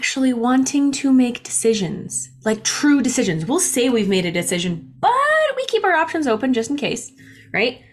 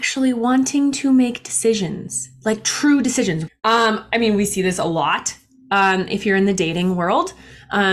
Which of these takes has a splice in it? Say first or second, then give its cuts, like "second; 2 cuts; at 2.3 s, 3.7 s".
second; 1 cut; at 3.5 s